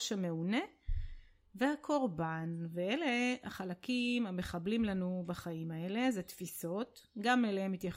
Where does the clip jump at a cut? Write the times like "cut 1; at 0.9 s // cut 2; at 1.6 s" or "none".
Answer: none